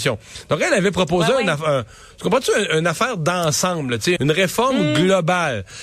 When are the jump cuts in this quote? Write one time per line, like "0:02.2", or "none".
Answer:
0:04.2